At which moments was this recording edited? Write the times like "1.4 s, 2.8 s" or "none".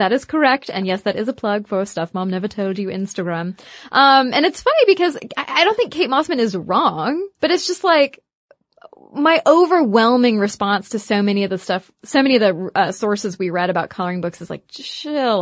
7.3 s

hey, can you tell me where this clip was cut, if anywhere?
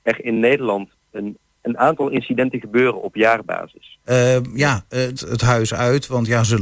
1.6 s, 4.0 s, 5.2 s

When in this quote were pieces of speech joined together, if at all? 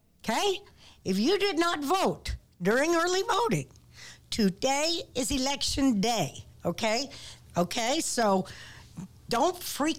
7.4 s

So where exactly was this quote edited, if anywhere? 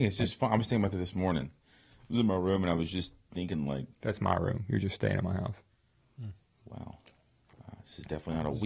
none

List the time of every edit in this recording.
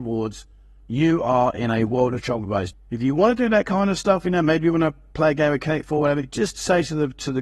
2.7 s

